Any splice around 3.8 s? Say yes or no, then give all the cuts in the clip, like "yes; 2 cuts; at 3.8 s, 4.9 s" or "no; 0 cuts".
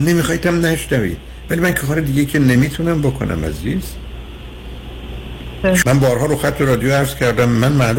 no; 1 cut; at 5.8 s